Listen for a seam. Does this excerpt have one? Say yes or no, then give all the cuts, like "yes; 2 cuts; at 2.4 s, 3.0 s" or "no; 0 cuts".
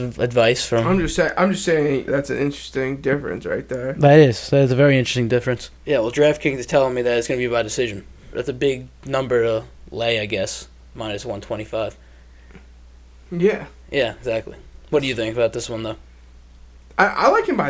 yes; 3 cuts; at 2.1 s, 5.8 s, 8.3 s